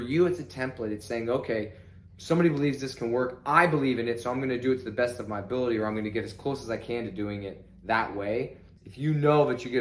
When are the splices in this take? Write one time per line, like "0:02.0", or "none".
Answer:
0:08.8